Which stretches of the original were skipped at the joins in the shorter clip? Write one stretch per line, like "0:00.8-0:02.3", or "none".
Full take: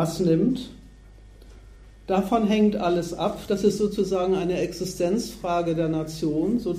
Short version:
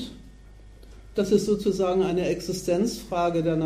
0:01.7-0:03.5